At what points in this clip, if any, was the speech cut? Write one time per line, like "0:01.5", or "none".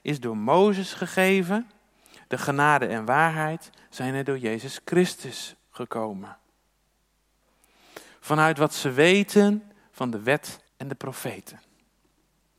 0:08.1
0:10.7